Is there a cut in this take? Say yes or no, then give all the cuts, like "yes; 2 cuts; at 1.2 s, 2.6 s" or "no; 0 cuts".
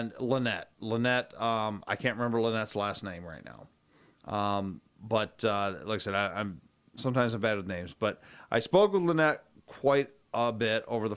no; 0 cuts